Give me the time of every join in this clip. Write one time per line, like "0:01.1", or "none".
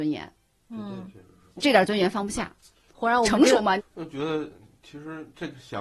0:01.6
0:03.8